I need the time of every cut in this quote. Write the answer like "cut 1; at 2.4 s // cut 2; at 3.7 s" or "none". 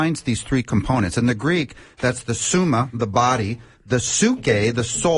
none